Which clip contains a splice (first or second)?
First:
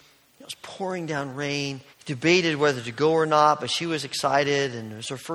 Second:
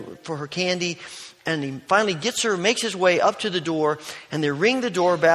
first